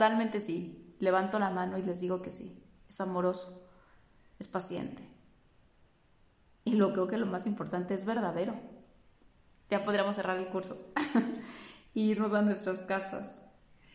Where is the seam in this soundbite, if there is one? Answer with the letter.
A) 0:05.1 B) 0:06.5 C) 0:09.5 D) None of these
C